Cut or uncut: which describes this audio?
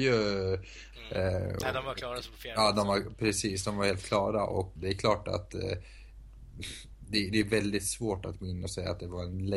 cut